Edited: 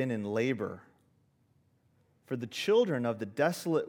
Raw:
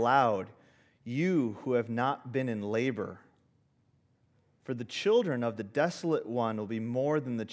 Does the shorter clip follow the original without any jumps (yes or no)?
yes